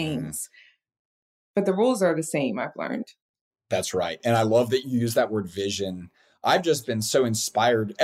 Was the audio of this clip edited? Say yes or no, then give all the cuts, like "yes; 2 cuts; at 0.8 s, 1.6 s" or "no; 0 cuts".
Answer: no; 0 cuts